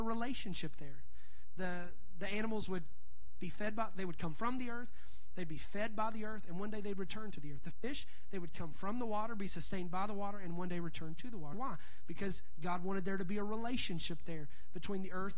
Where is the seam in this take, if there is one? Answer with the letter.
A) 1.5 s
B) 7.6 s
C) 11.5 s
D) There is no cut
C